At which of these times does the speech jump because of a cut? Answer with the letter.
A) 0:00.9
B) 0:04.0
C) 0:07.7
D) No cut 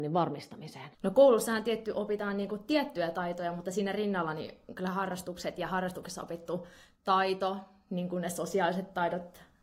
A